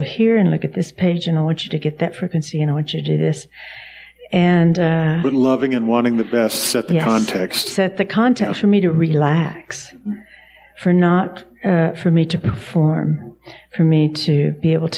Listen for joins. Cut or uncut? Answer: uncut